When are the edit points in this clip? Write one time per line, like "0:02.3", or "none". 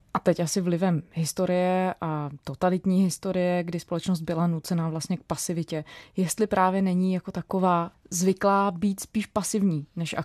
0:07.9